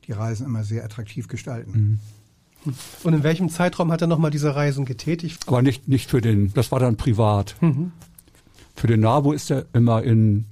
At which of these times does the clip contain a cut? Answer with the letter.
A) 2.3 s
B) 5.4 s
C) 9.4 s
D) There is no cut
B